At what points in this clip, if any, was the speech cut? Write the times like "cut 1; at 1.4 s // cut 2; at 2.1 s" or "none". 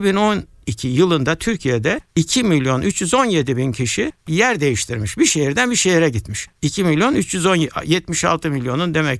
none